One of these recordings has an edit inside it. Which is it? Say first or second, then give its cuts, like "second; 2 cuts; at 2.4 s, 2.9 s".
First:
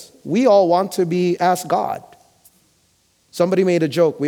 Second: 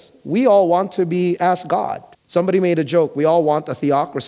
second; 1 cut; at 2.1 s